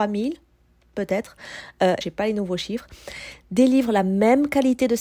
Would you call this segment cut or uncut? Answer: cut